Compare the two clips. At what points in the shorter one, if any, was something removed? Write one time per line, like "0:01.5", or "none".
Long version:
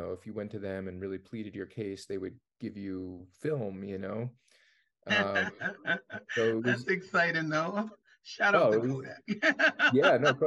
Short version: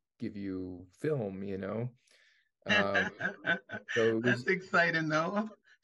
none